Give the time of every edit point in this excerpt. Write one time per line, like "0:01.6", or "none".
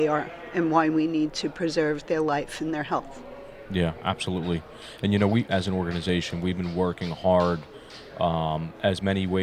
0:05.5